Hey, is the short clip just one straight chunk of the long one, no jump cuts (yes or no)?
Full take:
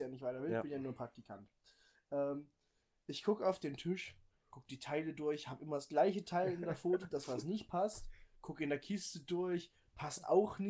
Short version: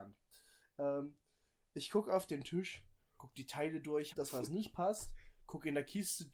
no